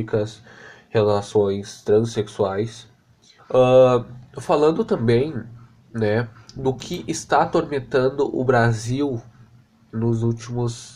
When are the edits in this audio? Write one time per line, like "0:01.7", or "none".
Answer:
0:03.4